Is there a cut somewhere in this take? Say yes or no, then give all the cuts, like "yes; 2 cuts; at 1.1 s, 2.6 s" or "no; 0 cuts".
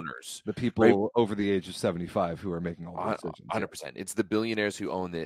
no; 0 cuts